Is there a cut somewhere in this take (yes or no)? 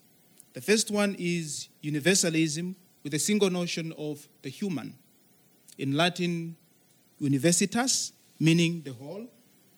yes